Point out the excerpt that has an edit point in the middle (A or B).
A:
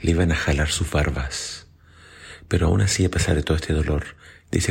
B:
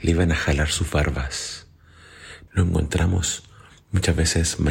B